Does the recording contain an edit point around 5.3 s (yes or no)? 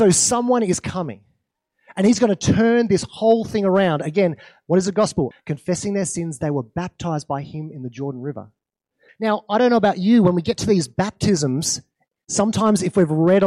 yes